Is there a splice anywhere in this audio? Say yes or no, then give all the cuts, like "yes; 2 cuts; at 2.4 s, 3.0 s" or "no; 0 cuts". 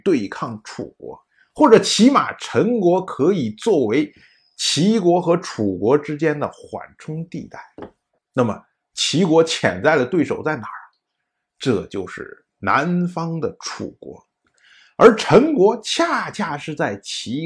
yes; 1 cut; at 8.2 s